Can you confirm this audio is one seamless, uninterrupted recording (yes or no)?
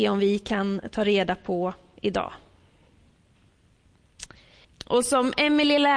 no